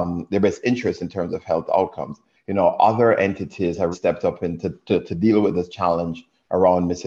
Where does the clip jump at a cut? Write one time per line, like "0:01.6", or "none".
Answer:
0:02.3
0:03.9